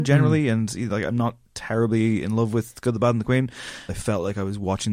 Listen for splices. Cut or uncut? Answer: cut